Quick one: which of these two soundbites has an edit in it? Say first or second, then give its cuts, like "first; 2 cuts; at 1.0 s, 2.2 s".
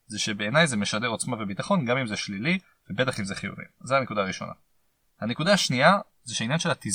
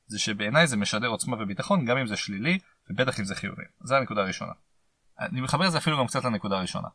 second; 1 cut; at 5.0 s